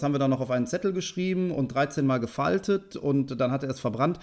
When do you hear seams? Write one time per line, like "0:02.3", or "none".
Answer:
none